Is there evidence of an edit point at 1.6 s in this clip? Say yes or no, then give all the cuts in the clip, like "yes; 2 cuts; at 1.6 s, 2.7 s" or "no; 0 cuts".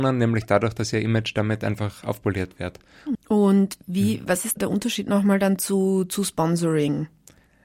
no; 2 cuts; at 3.1 s, 4.6 s